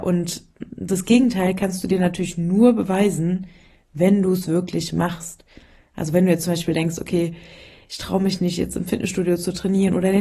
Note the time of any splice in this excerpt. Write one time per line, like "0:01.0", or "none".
none